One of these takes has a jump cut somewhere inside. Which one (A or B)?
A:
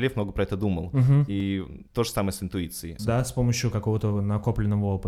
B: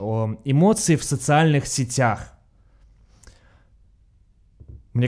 A